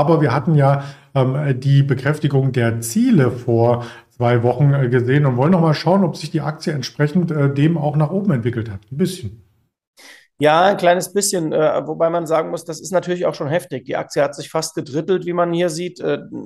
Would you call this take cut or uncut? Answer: uncut